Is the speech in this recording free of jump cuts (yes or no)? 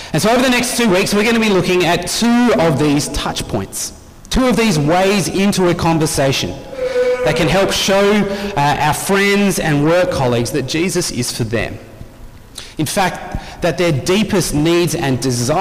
yes